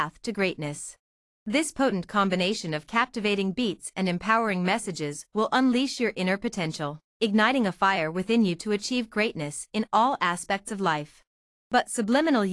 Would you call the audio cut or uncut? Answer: uncut